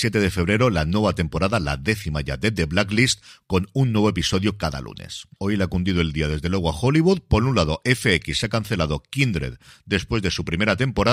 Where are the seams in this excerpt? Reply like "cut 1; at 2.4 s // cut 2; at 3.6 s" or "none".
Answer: cut 1; at 5.4 s